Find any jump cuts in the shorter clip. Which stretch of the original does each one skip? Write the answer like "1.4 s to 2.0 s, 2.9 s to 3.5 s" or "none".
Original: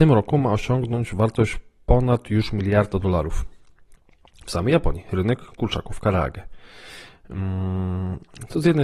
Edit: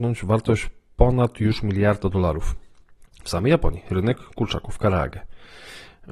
4.0 s to 4.3 s